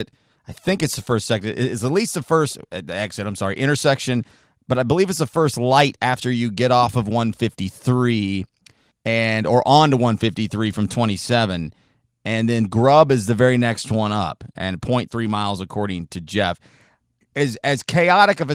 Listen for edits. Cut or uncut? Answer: uncut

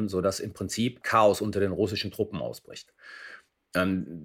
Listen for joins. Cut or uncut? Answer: cut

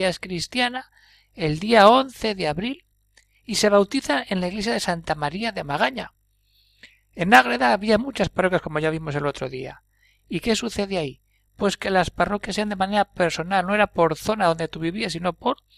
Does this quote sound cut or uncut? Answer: uncut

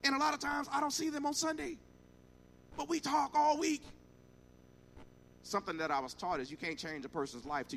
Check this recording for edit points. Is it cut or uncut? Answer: cut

